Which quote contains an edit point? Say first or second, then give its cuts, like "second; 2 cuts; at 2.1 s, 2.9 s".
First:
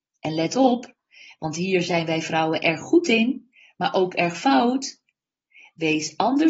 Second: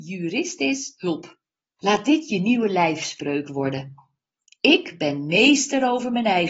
second; 1 cut; at 1.8 s